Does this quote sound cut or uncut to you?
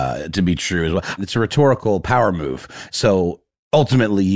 cut